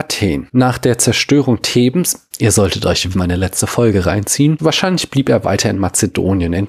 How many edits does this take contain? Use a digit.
2